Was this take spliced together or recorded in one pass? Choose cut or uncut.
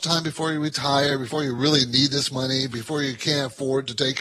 uncut